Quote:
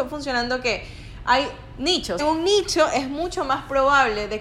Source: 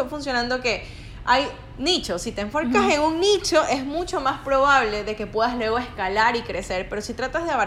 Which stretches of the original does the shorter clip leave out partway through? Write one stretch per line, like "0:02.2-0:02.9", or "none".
0:02.2-0:02.9